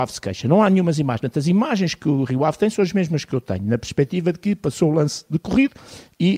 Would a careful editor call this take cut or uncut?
uncut